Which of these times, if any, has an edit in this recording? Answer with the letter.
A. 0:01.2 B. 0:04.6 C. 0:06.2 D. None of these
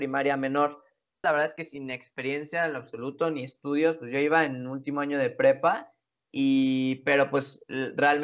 A